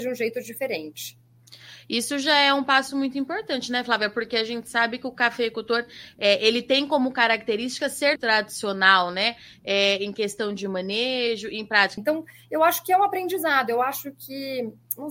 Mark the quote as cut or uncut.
cut